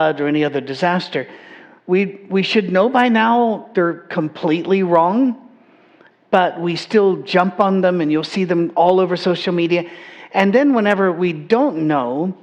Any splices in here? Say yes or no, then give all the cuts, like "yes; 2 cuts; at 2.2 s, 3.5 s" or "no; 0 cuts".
no; 0 cuts